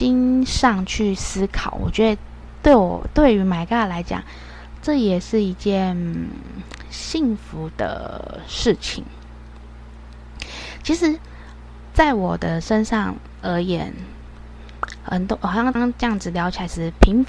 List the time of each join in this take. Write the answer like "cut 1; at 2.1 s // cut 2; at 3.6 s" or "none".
cut 1; at 15.8 s